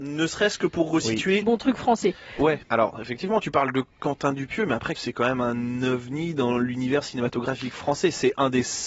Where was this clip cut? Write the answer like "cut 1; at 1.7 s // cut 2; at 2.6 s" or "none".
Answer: cut 1; at 1.4 s // cut 2; at 2.6 s // cut 3; at 5.0 s